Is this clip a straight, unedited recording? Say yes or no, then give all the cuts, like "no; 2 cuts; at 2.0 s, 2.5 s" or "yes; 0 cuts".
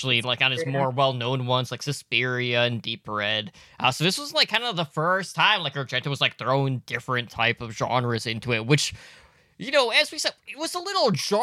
yes; 0 cuts